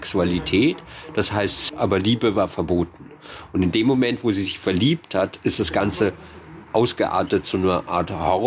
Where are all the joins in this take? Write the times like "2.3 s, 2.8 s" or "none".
1.7 s